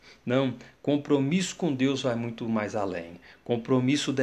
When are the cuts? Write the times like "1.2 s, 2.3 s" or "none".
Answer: none